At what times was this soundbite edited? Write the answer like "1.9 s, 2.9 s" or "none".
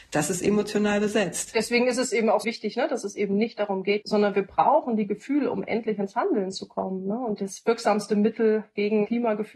2.4 s, 4.0 s